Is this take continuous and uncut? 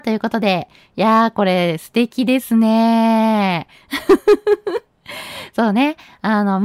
yes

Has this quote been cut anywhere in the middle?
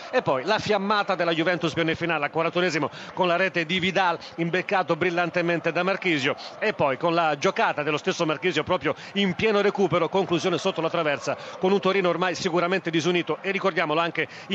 yes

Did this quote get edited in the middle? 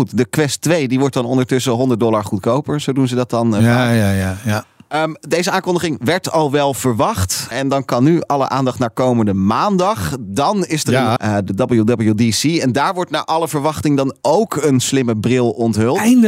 yes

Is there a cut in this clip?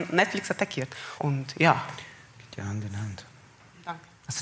yes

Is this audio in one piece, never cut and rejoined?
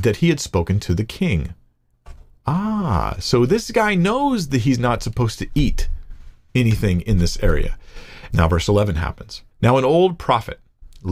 no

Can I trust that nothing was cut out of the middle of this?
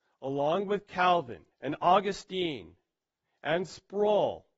no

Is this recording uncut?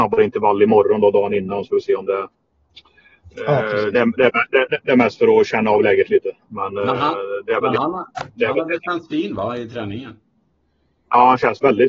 yes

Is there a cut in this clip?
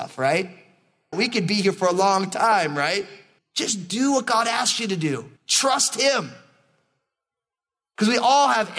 yes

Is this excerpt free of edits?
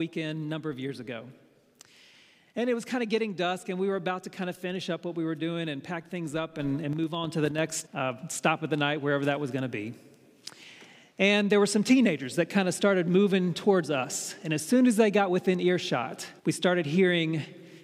no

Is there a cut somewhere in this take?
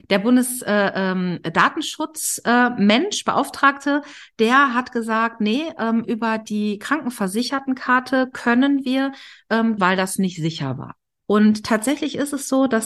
yes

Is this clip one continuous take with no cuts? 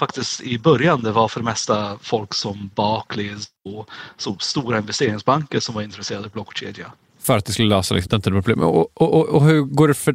no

